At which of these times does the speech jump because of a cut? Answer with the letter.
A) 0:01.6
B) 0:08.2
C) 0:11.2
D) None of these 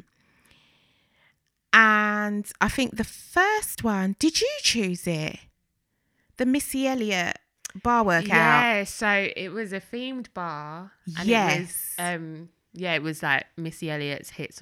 D